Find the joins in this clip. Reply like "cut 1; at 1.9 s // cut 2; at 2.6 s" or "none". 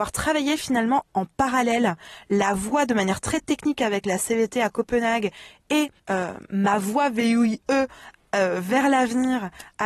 cut 1; at 6.0 s